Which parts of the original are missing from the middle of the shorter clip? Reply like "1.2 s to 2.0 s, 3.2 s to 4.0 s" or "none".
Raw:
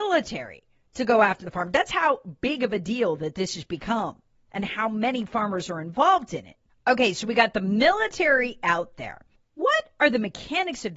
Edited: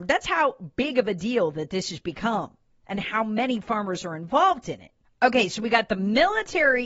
none